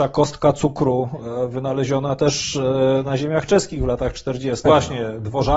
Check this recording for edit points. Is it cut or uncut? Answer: cut